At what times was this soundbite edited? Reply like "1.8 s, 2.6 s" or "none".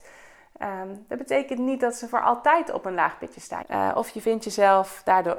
3.6 s